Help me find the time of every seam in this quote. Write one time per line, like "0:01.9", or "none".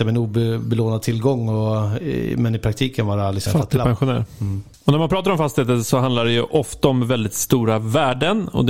none